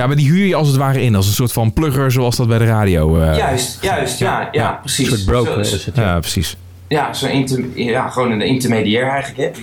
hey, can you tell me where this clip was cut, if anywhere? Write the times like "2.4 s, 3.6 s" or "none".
none